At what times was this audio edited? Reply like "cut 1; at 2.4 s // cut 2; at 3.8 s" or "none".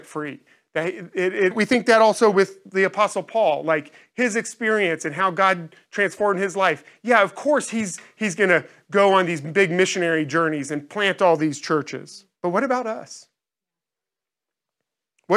cut 1; at 1.5 s // cut 2; at 12.3 s